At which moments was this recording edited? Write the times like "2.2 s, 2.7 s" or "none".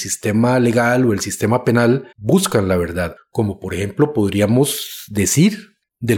2.1 s, 3.2 s